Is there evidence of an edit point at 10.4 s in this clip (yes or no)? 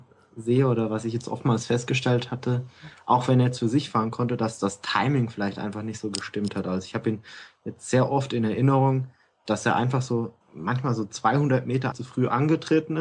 yes